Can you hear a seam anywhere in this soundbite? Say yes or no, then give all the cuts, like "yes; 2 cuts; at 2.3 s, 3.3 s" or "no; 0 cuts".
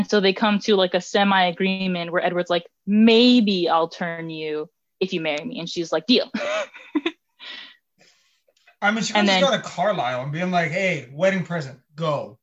no; 0 cuts